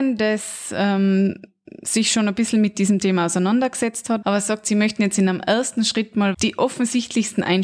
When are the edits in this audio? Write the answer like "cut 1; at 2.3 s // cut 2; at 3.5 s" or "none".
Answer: cut 1; at 4.2 s // cut 2; at 6.3 s